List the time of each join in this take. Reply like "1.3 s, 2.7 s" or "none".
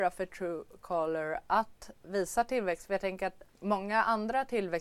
3.5 s